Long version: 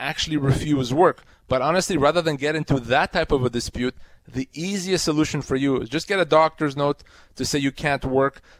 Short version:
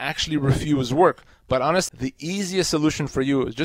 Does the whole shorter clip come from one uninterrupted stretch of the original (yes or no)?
no